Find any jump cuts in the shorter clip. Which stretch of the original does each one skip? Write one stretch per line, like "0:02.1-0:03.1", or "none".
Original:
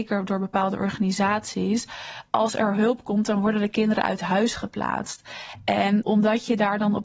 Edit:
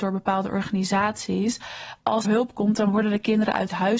0:02.5-0:02.7